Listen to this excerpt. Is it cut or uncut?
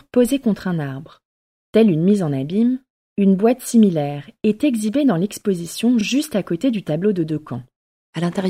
uncut